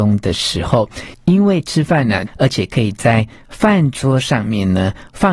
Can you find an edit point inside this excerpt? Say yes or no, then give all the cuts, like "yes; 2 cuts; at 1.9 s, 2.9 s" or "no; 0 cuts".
yes; 2 cuts; at 1.1 s, 2.3 s